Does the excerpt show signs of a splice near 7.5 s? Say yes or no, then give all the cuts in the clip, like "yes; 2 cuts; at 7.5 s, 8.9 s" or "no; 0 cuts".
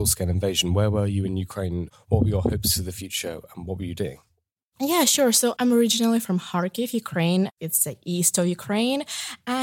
yes; 1 cut; at 7.5 s